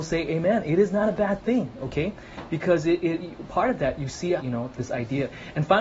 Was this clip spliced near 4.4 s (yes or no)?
yes